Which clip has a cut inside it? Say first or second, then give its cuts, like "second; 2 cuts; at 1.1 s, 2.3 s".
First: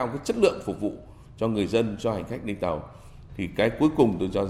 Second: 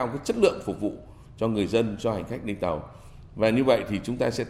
first; 1 cut; at 3.3 s